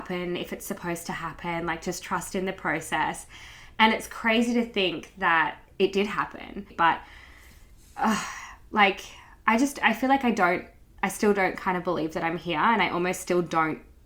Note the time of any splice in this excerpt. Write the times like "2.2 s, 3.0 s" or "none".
6.7 s